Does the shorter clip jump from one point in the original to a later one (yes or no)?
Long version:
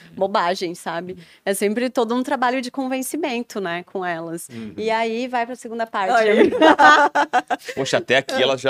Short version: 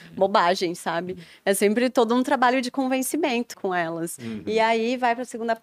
yes